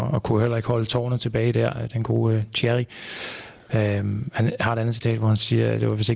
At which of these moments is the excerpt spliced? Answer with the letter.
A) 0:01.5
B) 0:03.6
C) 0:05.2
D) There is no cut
D